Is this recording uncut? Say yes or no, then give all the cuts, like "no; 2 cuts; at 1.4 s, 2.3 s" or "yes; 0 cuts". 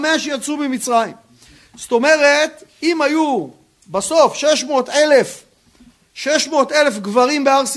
yes; 0 cuts